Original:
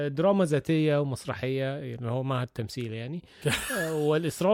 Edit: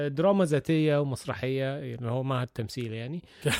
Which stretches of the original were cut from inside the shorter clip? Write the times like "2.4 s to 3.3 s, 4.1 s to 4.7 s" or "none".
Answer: none